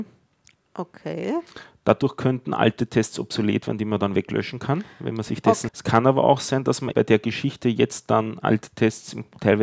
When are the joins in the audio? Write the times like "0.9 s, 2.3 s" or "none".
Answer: 5.7 s, 6.9 s